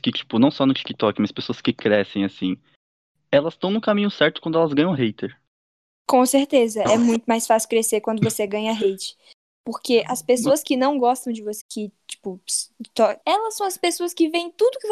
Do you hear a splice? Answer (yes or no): yes